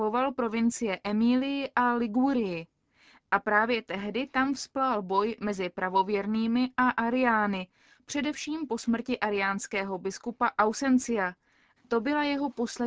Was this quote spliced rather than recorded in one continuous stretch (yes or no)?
yes